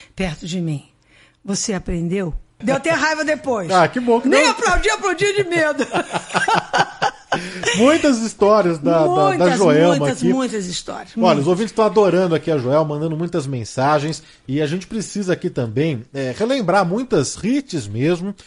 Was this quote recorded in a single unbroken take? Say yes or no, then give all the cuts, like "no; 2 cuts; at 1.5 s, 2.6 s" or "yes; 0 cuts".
no; 2 cuts; at 2.6 s, 17.4 s